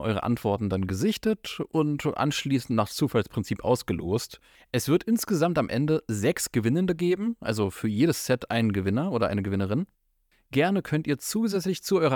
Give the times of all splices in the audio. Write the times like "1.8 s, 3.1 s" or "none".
none

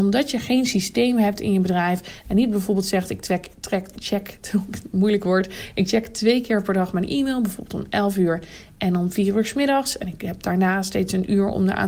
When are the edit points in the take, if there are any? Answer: none

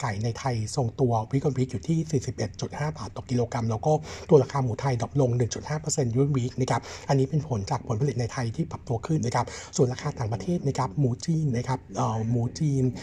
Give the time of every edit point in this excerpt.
9.2 s

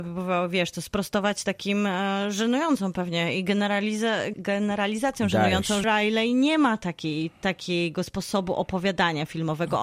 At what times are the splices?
4.3 s, 5.8 s

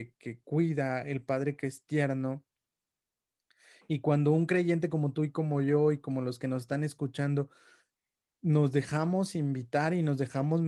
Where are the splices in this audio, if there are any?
none

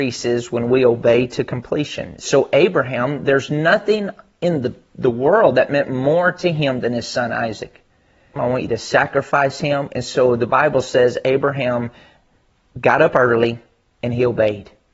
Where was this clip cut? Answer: 8.4 s

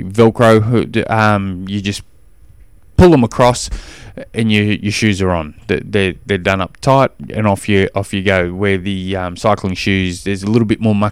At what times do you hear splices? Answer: none

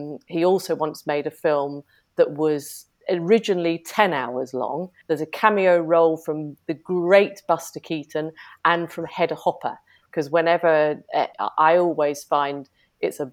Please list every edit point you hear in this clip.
5.0 s, 10.1 s, 11.3 s

